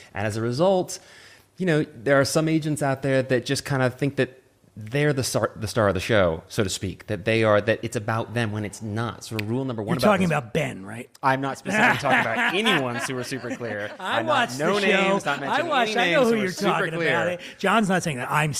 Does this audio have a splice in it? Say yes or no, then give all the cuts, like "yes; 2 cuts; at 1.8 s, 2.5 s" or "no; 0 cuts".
no; 0 cuts